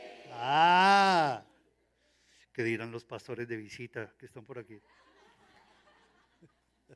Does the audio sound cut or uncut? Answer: uncut